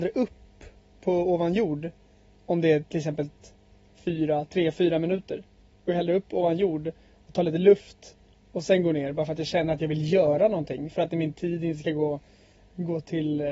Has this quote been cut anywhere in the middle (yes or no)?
no